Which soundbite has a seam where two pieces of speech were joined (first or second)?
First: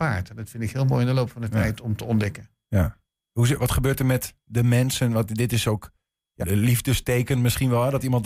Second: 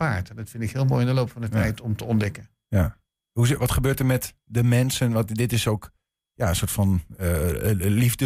first